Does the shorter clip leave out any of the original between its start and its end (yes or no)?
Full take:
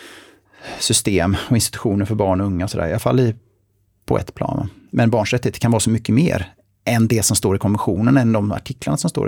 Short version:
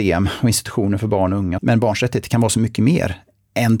yes